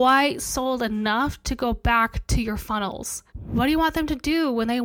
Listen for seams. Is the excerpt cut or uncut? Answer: cut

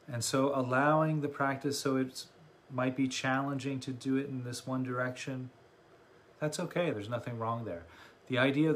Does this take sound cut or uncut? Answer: cut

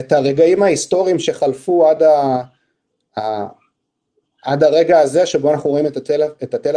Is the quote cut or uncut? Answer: uncut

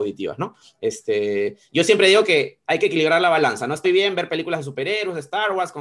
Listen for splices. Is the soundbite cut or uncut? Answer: cut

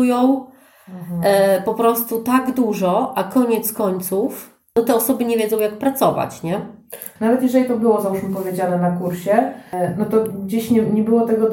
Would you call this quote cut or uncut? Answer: cut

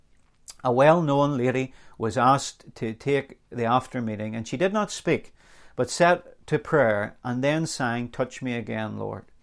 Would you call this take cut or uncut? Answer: cut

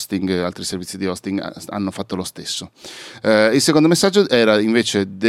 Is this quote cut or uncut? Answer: uncut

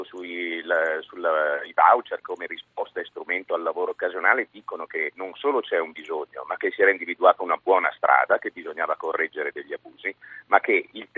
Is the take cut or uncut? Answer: uncut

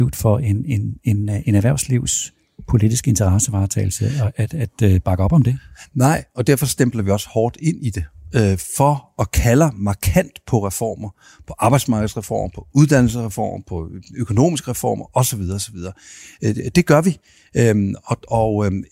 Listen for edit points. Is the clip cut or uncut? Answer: uncut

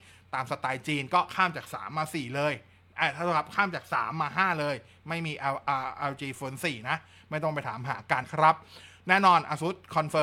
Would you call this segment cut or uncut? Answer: cut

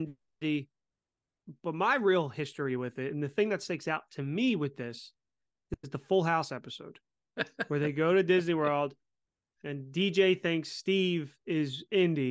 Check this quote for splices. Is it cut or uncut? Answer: uncut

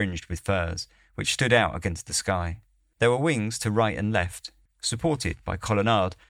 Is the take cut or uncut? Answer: cut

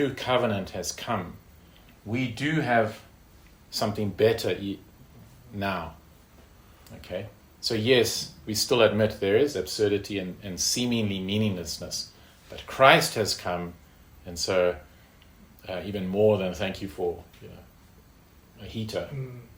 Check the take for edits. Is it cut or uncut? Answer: uncut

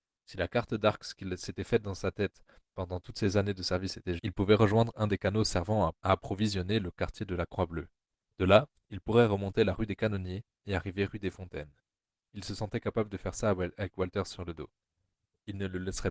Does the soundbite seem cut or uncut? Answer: cut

